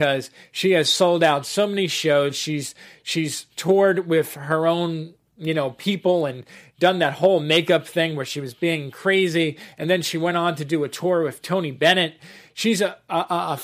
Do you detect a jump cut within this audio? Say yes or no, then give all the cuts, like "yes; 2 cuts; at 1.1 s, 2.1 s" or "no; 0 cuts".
no; 0 cuts